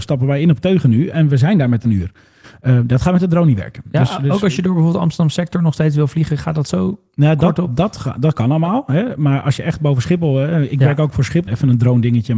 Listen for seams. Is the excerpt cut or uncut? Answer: cut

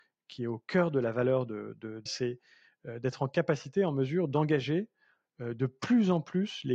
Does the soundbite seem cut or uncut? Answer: cut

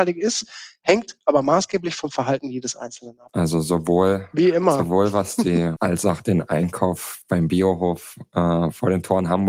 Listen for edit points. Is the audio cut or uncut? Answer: cut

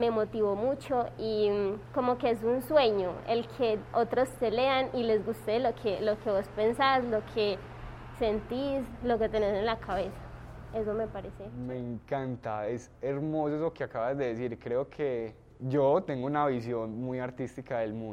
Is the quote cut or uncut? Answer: uncut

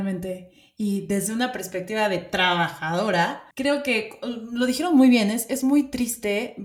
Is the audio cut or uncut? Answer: cut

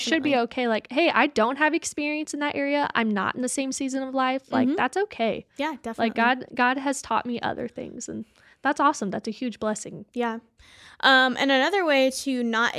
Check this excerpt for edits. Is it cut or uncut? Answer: uncut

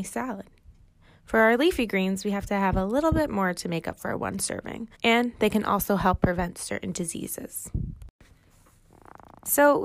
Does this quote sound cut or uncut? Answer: cut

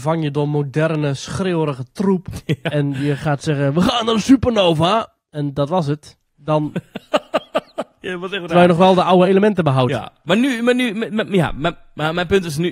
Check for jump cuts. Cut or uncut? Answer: uncut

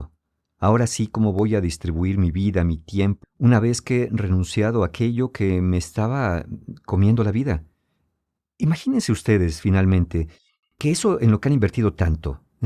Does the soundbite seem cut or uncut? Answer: cut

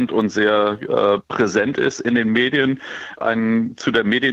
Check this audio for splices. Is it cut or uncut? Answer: cut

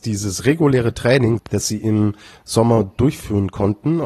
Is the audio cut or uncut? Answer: cut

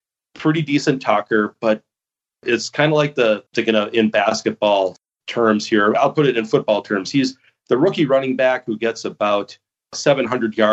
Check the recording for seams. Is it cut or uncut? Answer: cut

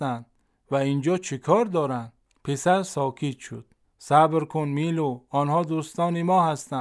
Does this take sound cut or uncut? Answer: cut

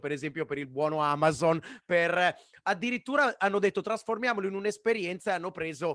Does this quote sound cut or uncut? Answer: uncut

